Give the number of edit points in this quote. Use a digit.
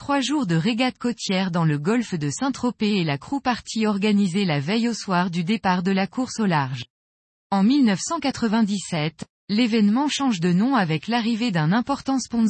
1